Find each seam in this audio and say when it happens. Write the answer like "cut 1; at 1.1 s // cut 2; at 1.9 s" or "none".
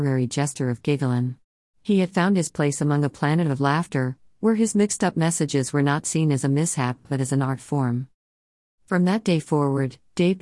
cut 1; at 1.7 s